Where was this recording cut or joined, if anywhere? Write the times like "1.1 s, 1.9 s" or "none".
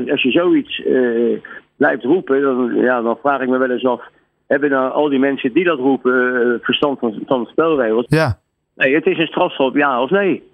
8.1 s